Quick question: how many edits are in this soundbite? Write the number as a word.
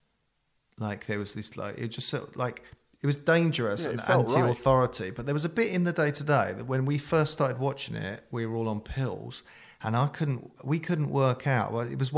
one